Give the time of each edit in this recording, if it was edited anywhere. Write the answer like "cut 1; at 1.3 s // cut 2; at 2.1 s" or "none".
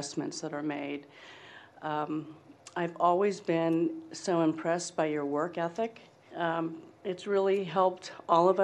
cut 1; at 6.3 s